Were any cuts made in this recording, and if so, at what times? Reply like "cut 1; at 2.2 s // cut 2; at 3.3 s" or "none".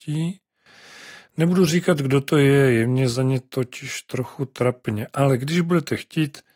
none